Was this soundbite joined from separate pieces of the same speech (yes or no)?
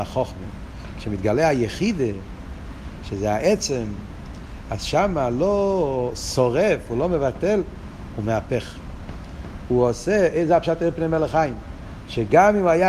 no